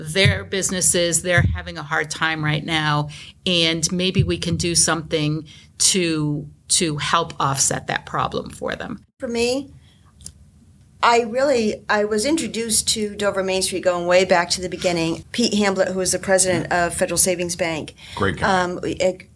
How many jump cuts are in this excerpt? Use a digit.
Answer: 1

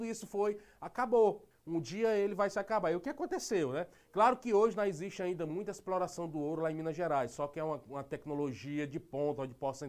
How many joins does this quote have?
1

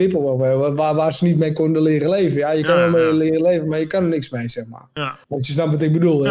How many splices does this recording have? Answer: 1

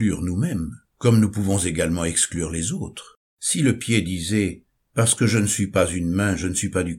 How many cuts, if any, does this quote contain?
1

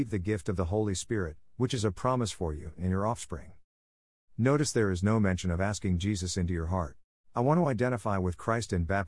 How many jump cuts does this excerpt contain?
1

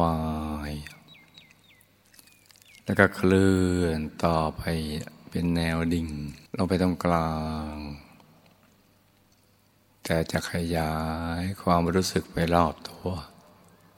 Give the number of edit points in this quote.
1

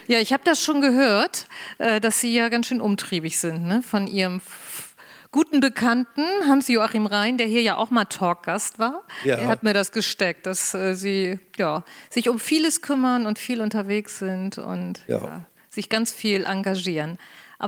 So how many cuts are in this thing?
0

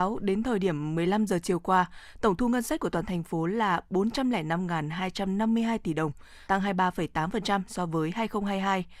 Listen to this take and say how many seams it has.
1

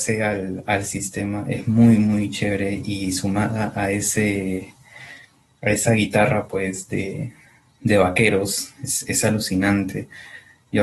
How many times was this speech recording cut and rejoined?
0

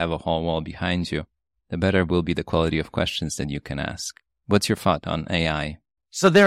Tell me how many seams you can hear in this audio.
0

